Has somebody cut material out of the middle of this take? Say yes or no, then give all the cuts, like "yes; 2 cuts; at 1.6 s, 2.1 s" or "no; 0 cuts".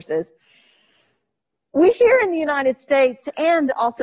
no; 0 cuts